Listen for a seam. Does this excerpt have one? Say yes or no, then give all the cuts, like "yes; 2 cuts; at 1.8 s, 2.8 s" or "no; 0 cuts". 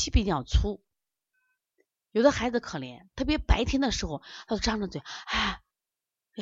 yes; 2 cuts; at 2.6 s, 5.2 s